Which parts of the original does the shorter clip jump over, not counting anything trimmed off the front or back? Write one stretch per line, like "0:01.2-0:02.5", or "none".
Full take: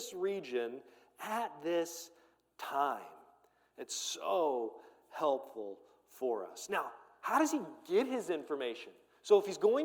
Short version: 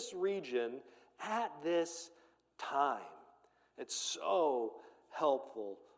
none